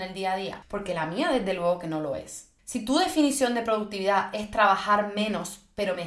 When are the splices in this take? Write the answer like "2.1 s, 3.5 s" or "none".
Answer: 2.6 s